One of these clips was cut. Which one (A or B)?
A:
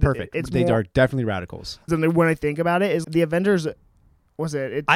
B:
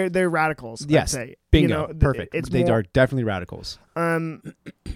A